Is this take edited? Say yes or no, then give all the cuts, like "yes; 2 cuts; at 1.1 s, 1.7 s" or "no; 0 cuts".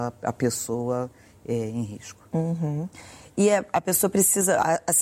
no; 0 cuts